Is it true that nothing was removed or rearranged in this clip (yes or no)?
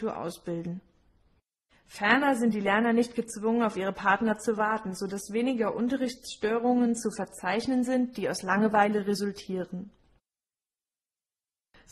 yes